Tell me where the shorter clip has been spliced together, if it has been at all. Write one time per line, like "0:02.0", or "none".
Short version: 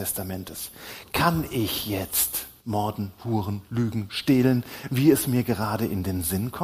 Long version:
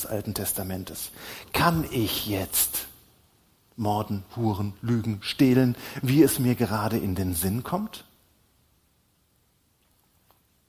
0:02.6